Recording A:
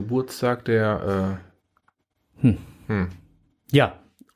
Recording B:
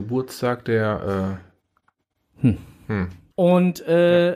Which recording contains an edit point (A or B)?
B